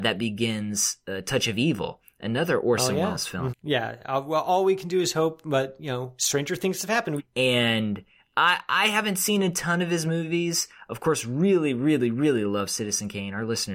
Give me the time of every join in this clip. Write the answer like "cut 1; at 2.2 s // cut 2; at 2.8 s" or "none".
cut 1; at 3.5 s // cut 2; at 7.2 s